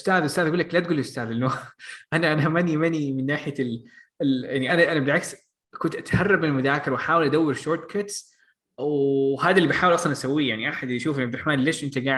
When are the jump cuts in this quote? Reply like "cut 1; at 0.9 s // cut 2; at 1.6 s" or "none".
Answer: cut 1; at 4.7 s